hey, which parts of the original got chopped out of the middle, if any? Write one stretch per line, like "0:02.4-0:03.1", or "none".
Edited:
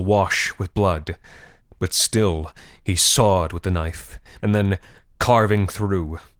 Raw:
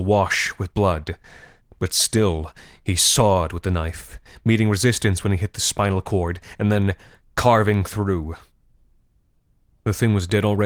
0:04.4-0:06.6